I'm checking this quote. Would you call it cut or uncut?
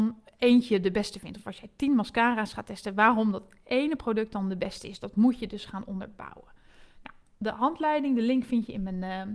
uncut